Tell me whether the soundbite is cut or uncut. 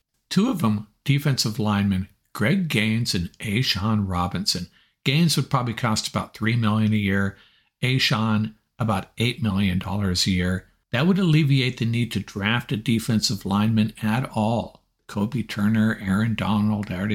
uncut